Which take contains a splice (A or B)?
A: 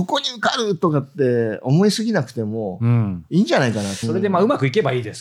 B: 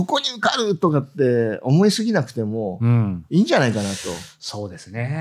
A